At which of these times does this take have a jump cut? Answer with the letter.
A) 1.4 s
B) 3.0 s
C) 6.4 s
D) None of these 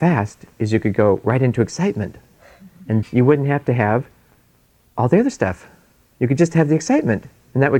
B